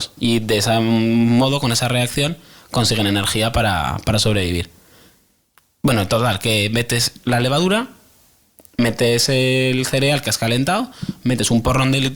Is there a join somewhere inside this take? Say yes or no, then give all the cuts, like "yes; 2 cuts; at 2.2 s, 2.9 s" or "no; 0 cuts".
no; 0 cuts